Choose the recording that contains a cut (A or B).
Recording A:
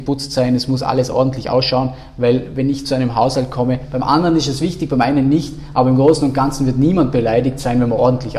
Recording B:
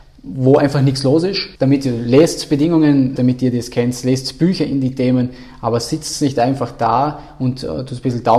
B